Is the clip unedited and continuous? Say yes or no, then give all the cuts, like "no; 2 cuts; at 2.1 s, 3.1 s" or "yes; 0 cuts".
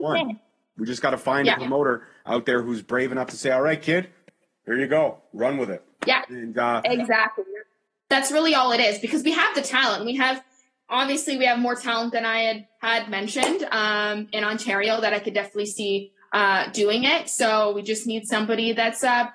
yes; 0 cuts